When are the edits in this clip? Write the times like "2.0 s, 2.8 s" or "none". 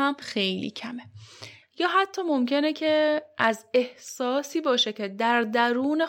1.6 s